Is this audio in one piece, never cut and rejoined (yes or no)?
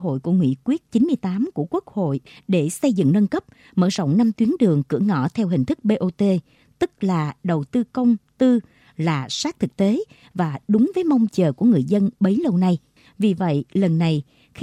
no